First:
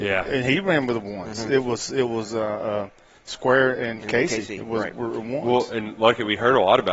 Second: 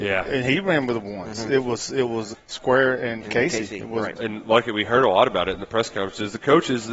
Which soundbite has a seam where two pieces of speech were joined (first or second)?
second